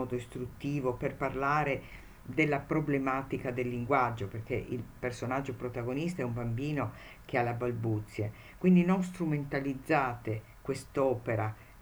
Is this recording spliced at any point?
no; 0 cuts

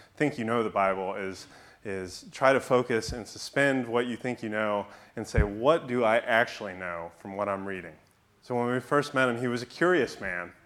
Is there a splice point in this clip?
no; 0 cuts

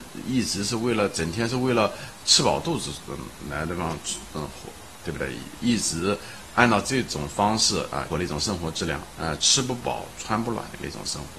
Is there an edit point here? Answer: yes; 2 cuts; at 8.1 s, 9.1 s

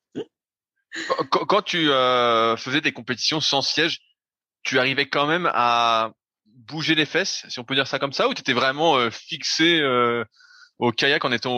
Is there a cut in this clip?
no; 0 cuts

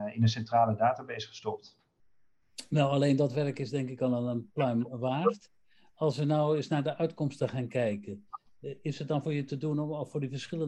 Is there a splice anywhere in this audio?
no; 0 cuts

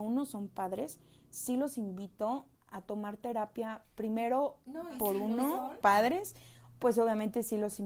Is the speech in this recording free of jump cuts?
no; 2 cuts; at 2.6 s, 5.8 s

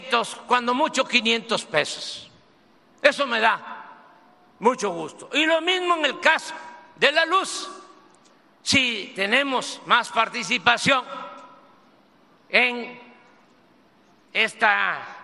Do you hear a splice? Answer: no; 0 cuts

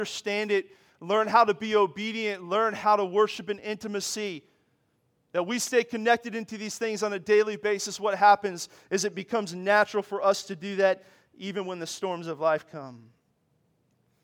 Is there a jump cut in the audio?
no; 0 cuts

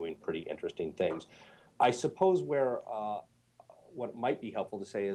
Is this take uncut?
yes; 0 cuts

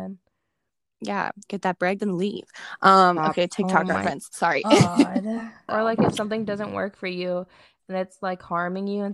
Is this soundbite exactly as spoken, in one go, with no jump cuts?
no; 2 cuts; at 2.0 s, 5.7 s

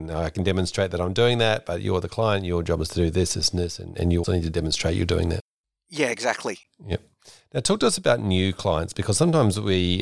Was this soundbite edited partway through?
yes; 2 cuts; at 4.2 s, 6.6 s

